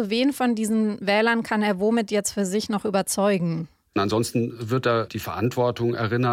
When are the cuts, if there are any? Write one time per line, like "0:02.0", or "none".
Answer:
0:03.9
0:05.1